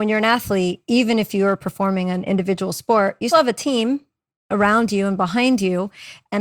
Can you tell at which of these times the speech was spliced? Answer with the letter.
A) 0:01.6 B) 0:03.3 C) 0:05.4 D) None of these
B